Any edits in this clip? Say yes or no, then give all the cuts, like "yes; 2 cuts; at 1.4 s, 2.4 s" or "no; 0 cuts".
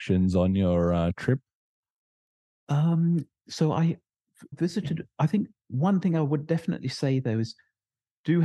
yes; 1 cut; at 4.5 s